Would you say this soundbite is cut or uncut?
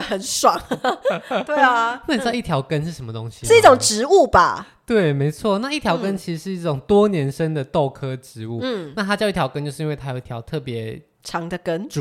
uncut